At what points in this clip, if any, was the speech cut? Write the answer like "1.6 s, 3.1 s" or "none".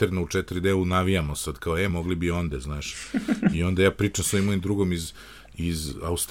1.9 s